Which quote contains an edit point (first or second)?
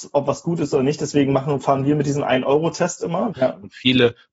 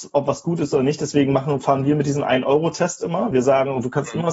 first